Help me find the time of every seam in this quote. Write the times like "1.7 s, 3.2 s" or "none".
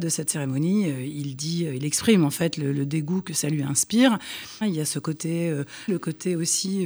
4.6 s, 5.9 s